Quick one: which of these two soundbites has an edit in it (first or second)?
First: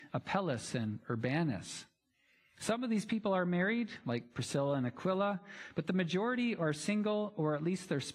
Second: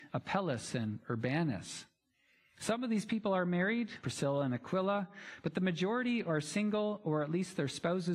second